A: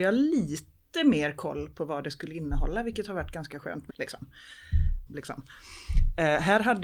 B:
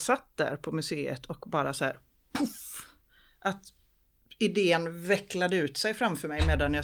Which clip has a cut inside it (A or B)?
A